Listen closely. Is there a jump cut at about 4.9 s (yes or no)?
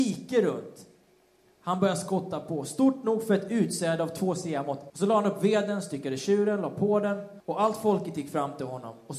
yes